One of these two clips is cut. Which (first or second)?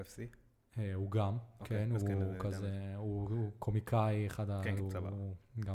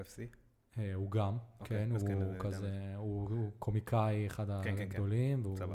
first